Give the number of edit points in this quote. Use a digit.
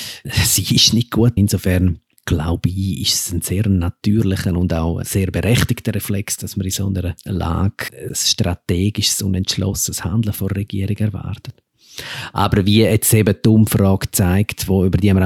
1